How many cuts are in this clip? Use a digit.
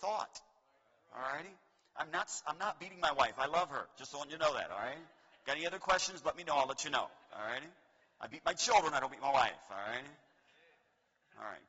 0